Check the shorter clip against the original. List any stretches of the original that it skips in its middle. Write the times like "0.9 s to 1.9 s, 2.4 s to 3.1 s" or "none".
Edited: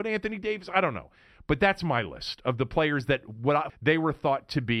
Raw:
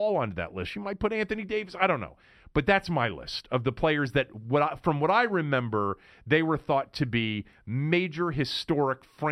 4.8 s to 6.1 s